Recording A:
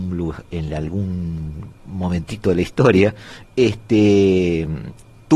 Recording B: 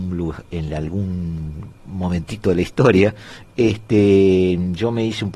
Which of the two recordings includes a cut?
B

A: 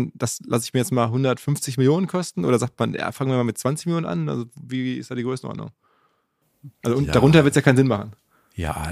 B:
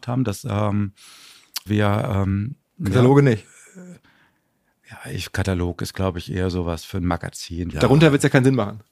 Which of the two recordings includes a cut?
B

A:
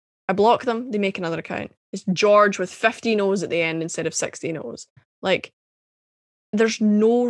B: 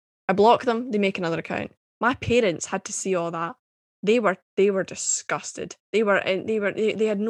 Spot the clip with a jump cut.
B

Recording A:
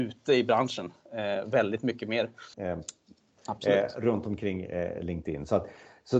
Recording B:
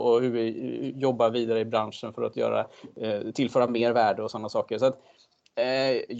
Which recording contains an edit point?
A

